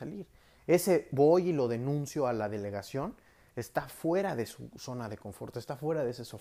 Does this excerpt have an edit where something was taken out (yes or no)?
no